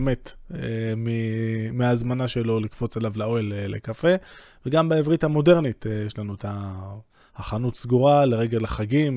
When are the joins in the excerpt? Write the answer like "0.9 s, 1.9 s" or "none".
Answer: none